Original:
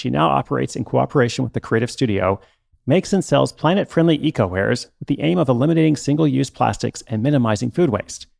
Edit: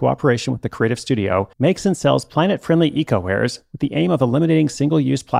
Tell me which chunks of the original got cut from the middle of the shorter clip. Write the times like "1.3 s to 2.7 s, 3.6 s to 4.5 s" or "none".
2.4 s to 2.8 s

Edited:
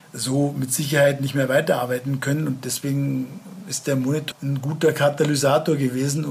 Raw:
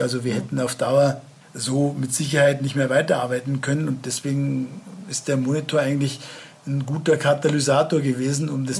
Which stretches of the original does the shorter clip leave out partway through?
5.7 s to 6.6 s

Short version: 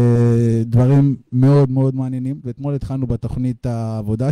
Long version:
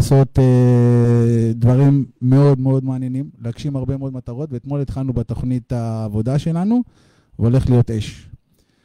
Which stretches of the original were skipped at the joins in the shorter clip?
3.3 s to 4.5 s

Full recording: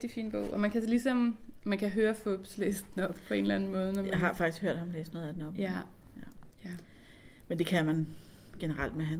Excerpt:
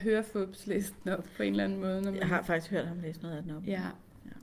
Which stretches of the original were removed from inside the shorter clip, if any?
none

